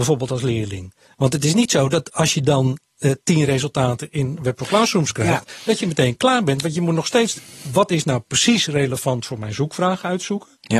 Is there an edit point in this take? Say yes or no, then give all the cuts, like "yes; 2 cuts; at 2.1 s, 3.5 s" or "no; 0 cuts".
no; 0 cuts